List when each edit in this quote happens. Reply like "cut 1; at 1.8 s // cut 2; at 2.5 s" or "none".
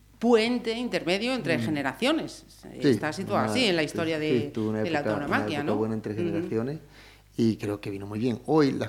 none